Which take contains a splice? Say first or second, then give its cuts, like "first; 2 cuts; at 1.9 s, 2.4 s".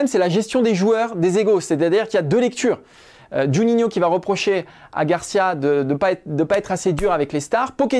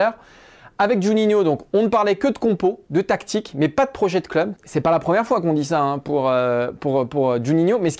second; 1 cut; at 4.6 s